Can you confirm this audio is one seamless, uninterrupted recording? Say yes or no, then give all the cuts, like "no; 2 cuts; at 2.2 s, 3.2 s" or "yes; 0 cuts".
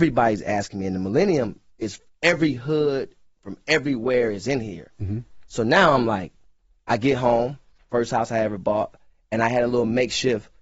yes; 0 cuts